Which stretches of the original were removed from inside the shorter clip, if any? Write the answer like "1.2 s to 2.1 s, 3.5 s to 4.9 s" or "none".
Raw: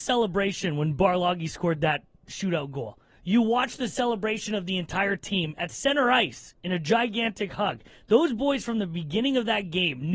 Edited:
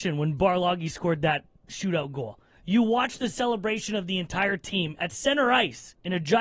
none